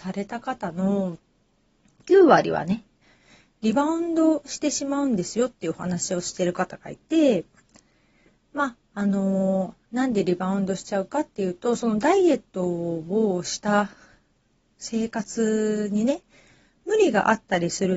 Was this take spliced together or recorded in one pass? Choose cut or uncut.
uncut